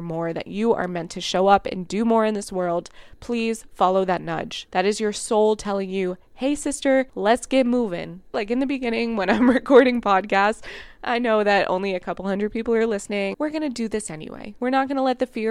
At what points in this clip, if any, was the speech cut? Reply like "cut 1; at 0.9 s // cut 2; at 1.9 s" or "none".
cut 1; at 8.3 s // cut 2; at 13.3 s

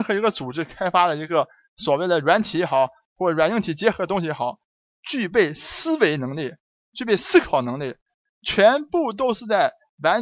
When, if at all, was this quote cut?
none

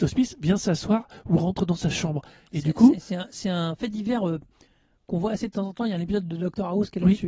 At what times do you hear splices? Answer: none

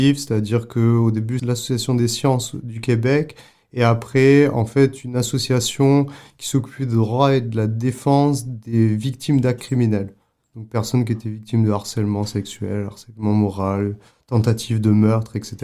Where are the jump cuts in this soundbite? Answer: cut 1; at 1.4 s

